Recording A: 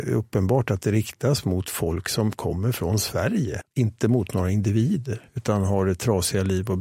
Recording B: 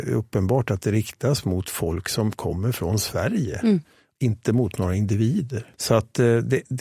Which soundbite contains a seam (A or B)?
A